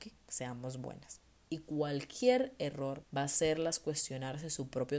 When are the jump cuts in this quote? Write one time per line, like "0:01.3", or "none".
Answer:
0:01.5
0:03.0